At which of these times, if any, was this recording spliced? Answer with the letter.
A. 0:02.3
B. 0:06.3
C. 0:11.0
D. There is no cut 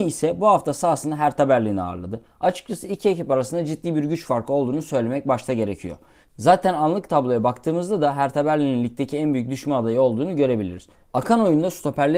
C